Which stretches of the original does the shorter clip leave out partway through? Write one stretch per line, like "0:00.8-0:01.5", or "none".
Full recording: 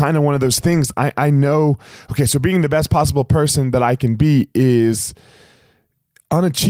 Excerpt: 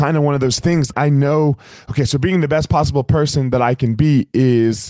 0:00.9-0:01.1